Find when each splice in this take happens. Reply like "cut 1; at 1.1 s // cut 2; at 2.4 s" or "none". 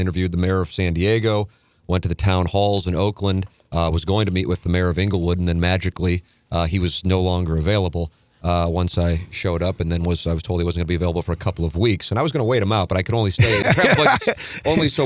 none